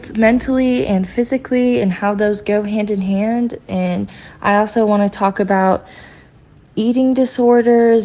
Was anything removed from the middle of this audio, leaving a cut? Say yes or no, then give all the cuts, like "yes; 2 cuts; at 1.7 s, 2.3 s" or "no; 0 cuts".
no; 0 cuts